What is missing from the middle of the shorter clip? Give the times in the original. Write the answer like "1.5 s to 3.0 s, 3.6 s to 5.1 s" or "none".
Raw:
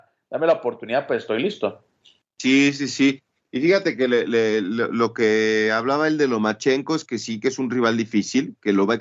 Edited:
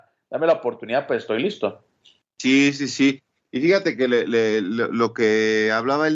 none